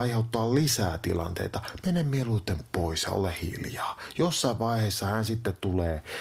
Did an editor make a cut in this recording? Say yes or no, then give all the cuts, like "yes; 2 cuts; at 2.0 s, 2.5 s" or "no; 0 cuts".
no; 0 cuts